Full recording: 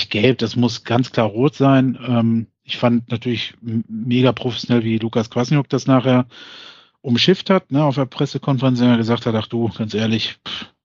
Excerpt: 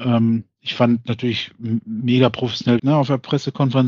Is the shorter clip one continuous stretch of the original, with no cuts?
no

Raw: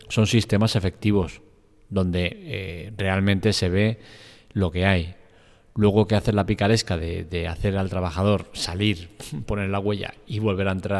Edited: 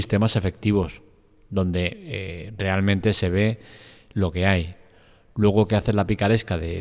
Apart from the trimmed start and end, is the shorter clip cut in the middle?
no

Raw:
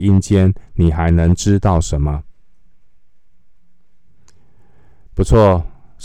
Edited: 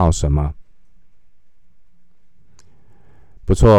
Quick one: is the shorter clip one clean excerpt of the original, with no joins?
yes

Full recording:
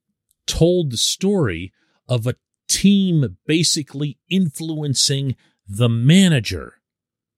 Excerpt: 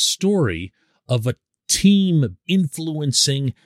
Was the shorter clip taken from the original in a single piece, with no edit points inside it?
no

